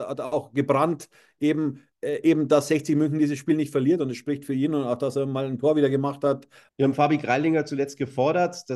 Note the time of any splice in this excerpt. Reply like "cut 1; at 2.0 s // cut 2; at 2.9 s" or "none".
cut 1; at 6.7 s